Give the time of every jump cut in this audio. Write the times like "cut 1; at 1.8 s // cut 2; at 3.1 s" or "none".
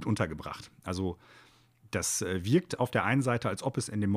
none